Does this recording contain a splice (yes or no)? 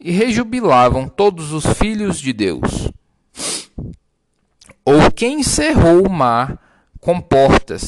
no